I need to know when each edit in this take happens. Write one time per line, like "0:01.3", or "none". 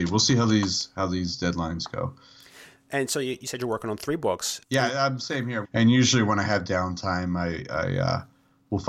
0:04.6
0:05.6